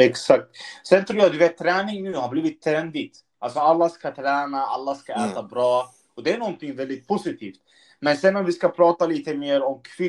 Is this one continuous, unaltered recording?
yes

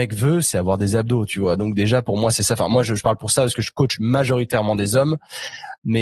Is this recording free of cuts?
yes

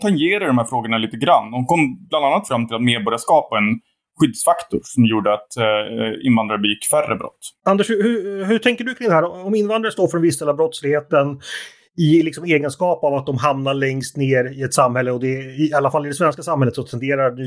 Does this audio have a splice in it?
no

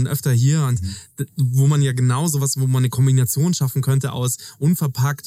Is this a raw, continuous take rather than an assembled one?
yes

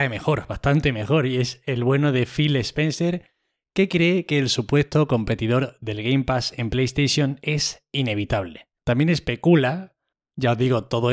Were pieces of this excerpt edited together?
yes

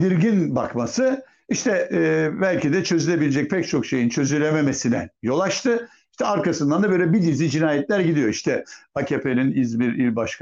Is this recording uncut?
yes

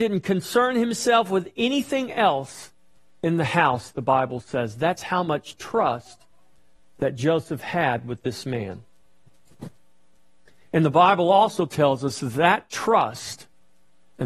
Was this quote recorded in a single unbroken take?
yes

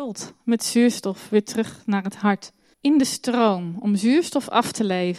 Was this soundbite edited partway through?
yes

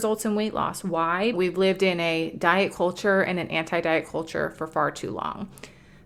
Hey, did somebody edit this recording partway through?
yes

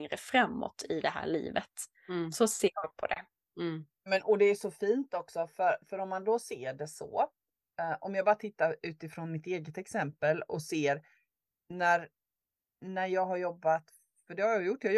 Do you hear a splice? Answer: no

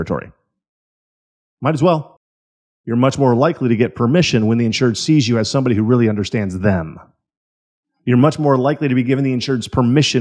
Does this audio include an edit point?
no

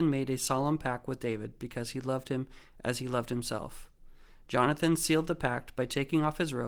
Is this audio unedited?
yes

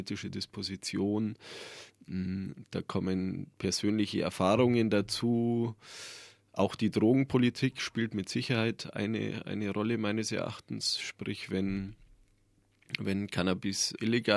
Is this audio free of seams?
yes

